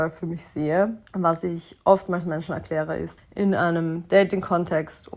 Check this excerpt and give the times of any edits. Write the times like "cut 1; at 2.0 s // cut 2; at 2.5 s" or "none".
cut 1; at 1.1 s // cut 2; at 3.2 s